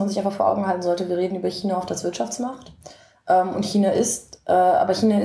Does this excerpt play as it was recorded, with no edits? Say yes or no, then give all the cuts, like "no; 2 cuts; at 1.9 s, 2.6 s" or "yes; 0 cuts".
yes; 0 cuts